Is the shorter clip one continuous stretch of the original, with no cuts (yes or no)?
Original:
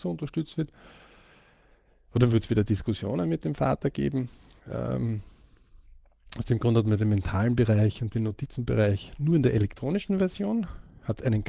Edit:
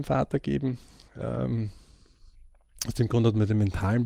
yes